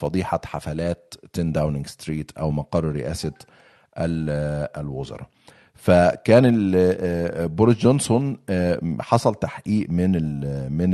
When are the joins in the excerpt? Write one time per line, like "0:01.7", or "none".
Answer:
none